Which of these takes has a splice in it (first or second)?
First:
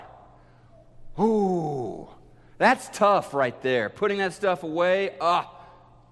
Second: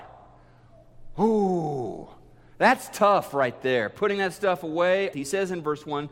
second